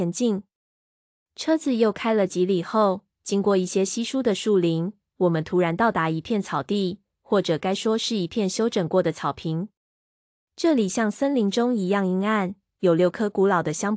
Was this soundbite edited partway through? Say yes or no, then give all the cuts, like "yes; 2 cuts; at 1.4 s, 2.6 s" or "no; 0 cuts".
no; 0 cuts